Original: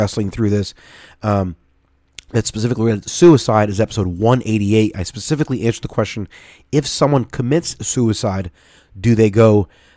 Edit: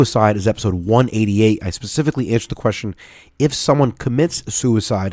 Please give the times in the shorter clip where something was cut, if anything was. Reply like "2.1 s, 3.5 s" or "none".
none